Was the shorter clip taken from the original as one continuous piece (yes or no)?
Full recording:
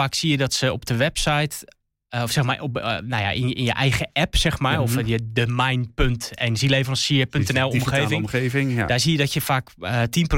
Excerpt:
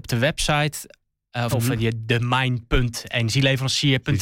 no